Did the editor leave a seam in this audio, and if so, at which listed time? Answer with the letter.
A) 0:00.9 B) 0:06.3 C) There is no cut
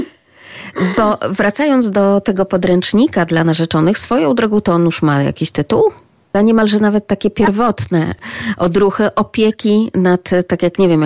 B